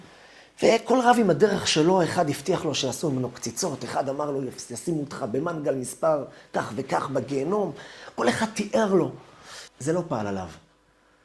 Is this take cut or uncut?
cut